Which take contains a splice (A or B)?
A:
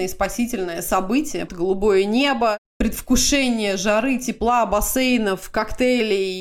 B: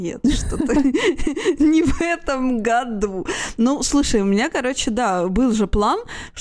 A